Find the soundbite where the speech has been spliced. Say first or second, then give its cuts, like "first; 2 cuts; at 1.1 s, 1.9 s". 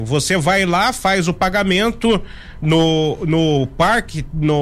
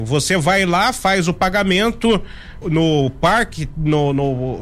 second; 1 cut; at 2.6 s